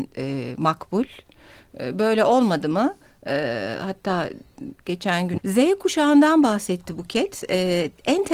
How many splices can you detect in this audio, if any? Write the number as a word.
one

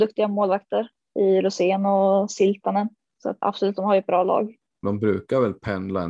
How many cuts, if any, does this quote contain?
two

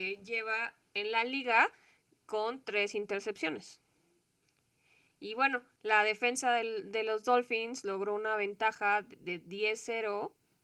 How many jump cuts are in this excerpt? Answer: zero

